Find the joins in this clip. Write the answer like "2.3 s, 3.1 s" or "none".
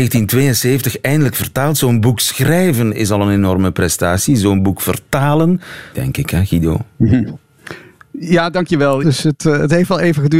5.9 s, 9.0 s